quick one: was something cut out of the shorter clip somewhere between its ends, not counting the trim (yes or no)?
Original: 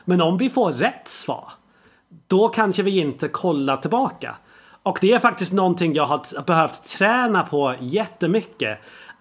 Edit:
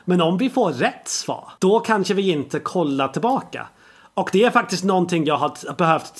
yes